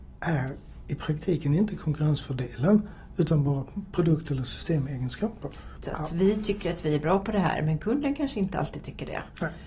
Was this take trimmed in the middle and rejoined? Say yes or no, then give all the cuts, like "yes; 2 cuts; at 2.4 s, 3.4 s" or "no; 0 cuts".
yes; 1 cut; at 5.8 s